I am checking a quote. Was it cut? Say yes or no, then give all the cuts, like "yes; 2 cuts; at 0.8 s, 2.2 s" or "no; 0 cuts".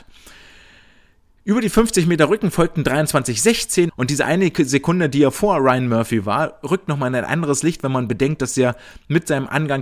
yes; 1 cut; at 3.9 s